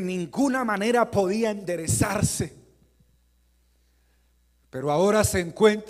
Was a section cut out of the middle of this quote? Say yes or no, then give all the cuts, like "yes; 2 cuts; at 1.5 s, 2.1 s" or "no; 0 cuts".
no; 0 cuts